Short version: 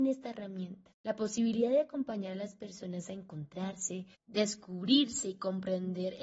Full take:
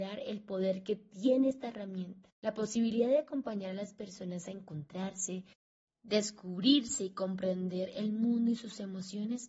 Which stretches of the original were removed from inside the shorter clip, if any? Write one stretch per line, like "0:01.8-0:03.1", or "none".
0:05.5-0:05.9

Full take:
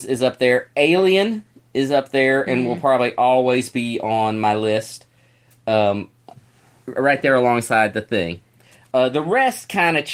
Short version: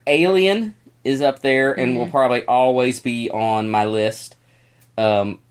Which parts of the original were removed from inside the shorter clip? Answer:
none

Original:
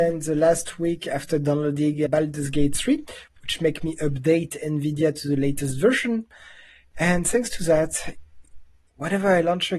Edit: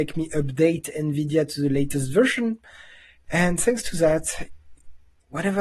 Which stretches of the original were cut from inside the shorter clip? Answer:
none

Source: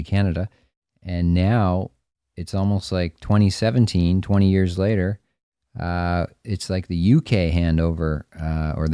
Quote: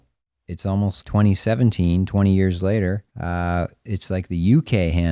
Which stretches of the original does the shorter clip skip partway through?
0:02.9-0:03.2
0:05.2-0:05.7

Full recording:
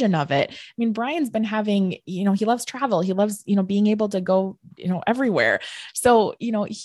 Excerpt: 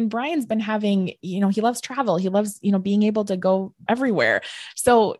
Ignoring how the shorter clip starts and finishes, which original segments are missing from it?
0:04.7-0:05.0

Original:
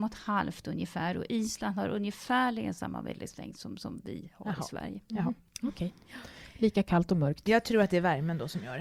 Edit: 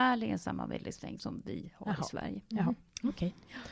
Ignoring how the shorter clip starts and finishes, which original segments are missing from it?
0:03.5-0:03.8

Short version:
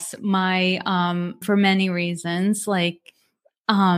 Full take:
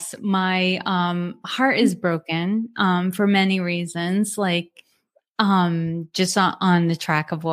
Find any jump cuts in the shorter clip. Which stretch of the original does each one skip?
0:01.4-0:03.1

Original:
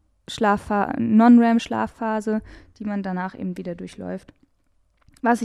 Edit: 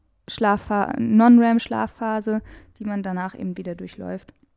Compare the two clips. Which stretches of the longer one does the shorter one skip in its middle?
none

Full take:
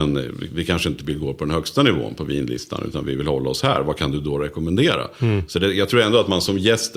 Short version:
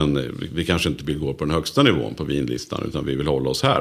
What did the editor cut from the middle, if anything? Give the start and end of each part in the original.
none

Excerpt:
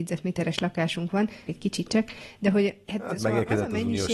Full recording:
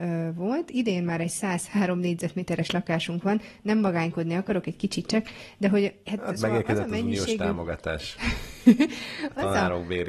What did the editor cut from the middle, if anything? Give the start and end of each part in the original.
0:03.6-0:04.6

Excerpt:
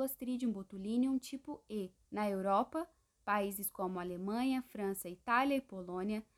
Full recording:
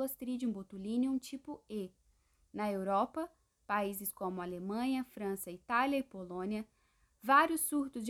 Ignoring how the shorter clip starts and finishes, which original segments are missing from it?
0:02.0-0:02.4

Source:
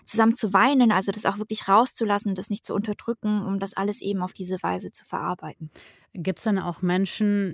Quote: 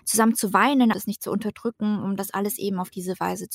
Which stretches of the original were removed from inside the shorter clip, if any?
0:00.9-0:02.4

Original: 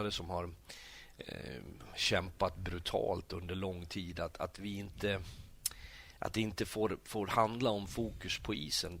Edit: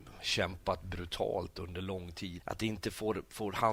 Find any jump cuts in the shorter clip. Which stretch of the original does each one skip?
0:04.1-0:06.1

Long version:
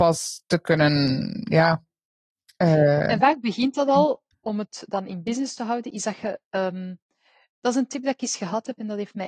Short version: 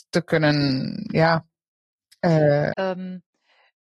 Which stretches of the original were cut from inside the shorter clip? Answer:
0:03.1-0:06.5

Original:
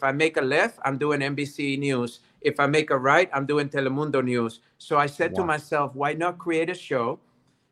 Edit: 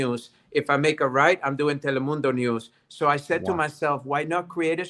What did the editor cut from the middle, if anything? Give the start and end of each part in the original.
none

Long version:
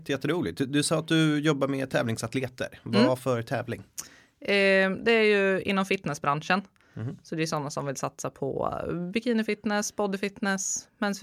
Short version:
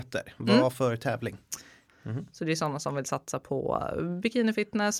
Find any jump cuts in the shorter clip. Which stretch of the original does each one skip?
0:04.3-0:06.8

